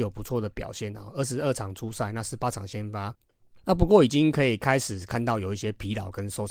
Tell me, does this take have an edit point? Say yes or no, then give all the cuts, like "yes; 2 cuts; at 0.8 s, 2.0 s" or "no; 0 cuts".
no; 0 cuts